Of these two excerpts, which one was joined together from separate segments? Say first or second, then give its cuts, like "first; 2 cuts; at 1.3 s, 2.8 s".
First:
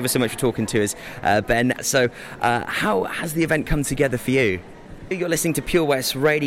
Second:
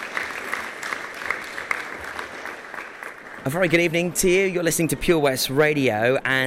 first; 2 cuts; at 1.8 s, 5.1 s